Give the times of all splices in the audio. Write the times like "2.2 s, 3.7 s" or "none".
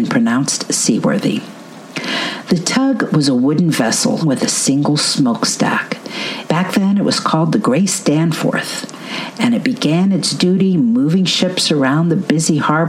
4.2 s, 6.5 s